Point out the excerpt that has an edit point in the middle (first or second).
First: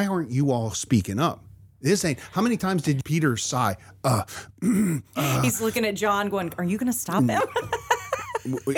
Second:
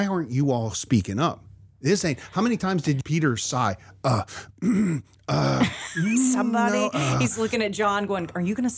first